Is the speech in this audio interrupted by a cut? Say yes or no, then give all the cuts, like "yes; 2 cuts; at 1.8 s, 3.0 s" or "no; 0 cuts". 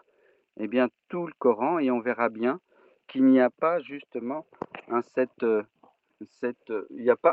no; 0 cuts